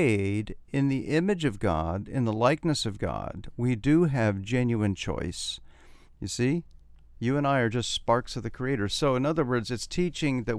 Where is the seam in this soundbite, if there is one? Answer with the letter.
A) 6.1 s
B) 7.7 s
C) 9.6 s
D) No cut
A